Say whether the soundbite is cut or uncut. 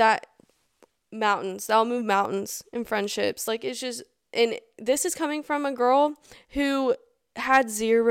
uncut